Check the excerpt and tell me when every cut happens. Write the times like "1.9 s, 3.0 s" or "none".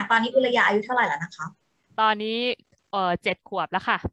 none